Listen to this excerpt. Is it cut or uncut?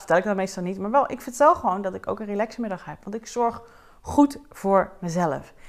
uncut